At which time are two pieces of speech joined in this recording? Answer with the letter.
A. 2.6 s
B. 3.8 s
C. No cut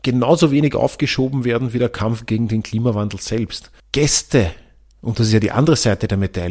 B